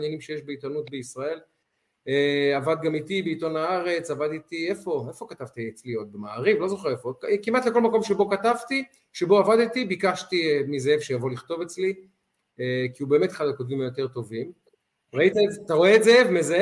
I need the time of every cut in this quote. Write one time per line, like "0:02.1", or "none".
0:15.1